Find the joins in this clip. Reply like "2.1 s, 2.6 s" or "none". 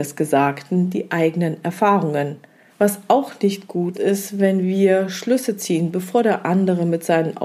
2.7 s, 3.9 s